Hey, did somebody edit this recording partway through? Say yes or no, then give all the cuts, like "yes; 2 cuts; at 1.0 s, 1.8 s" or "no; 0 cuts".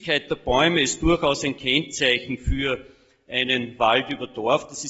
no; 0 cuts